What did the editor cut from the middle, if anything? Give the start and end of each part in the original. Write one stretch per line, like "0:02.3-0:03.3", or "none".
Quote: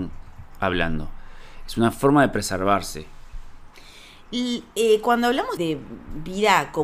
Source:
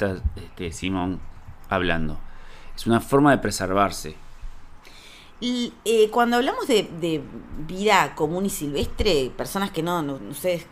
0:06.7-0:07.0